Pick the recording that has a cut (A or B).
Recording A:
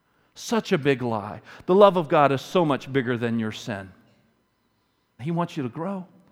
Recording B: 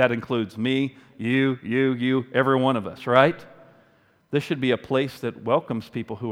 A